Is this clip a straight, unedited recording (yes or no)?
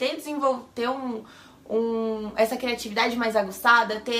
yes